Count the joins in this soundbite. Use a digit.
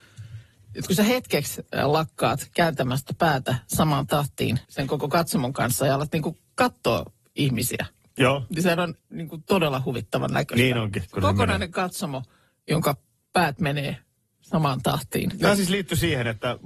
2